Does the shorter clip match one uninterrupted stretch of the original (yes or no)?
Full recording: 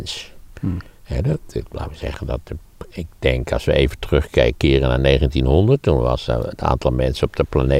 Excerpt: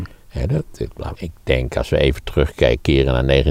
no